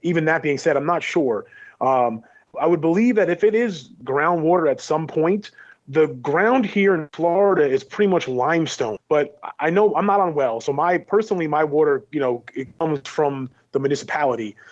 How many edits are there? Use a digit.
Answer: 2